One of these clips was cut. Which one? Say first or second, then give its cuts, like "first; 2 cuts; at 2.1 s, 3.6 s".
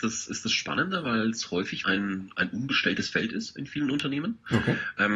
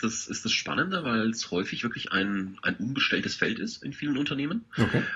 first; 1 cut; at 1.8 s